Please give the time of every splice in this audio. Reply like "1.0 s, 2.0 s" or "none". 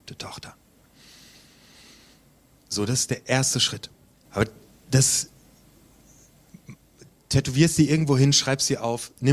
4.2 s